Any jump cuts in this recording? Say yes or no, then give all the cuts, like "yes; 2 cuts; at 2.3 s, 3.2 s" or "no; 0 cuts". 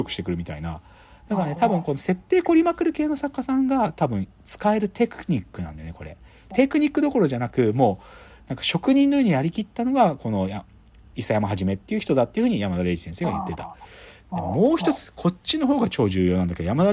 yes; 1 cut; at 6.5 s